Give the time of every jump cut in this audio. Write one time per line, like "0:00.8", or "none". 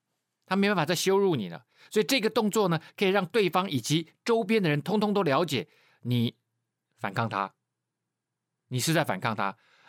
none